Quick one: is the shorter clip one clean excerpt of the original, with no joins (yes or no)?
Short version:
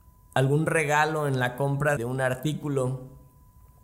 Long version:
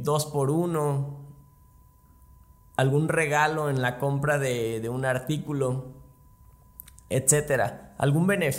no